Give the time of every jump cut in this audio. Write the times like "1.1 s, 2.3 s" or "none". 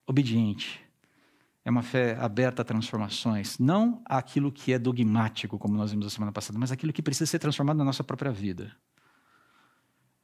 none

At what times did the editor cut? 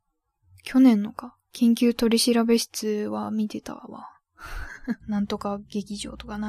5.0 s

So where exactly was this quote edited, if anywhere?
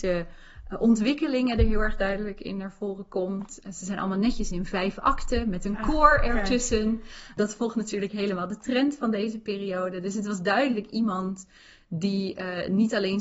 none

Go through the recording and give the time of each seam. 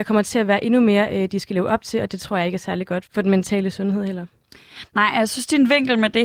3.1 s

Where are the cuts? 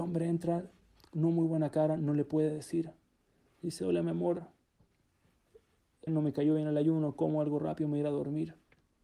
6.1 s

